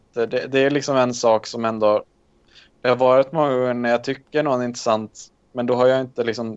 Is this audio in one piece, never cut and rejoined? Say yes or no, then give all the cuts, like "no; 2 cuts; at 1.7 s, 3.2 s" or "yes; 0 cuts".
yes; 0 cuts